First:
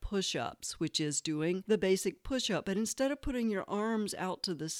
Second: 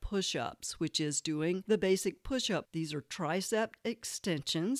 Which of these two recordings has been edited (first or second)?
second